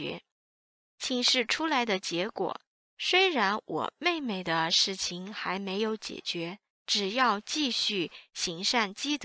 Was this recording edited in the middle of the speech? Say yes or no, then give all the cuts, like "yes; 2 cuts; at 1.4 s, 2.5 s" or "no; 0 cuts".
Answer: yes; 2 cuts; at 2.8 s, 6.8 s